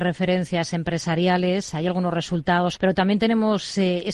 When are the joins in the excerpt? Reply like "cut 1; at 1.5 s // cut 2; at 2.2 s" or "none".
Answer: cut 1; at 2.8 s